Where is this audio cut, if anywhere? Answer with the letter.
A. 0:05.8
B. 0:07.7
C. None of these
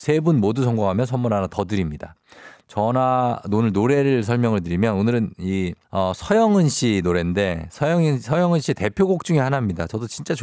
A